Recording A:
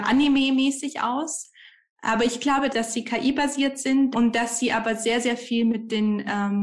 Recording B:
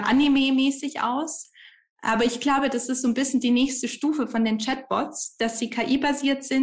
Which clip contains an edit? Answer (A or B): A